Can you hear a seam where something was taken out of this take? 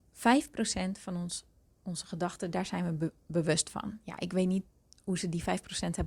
no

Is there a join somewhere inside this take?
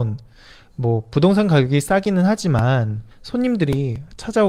yes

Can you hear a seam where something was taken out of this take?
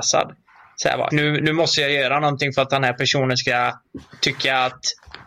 yes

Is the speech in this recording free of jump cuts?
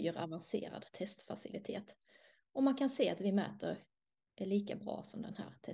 yes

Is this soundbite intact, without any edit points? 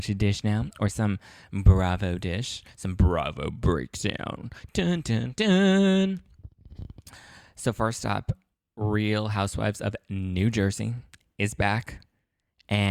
yes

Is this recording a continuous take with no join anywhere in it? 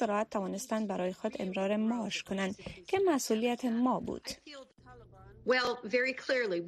no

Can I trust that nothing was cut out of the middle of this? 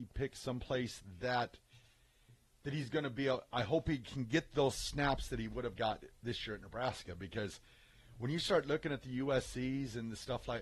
yes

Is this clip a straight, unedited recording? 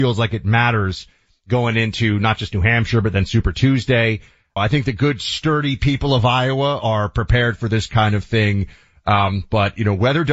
no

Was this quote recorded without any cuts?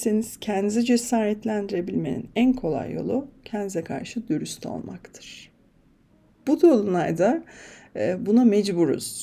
yes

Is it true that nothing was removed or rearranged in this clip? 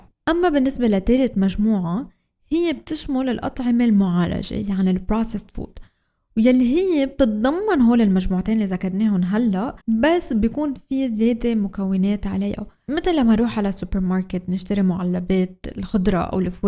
no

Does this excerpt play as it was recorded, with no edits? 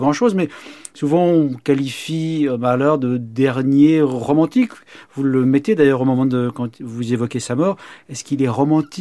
yes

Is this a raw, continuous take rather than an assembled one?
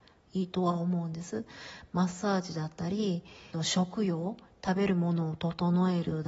no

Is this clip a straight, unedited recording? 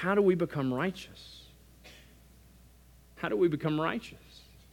yes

